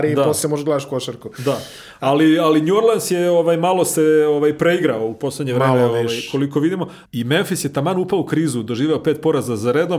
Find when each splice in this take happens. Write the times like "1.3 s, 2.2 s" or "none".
7.1 s